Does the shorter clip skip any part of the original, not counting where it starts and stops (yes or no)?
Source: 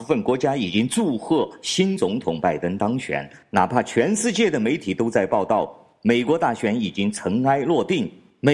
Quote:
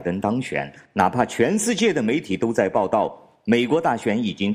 no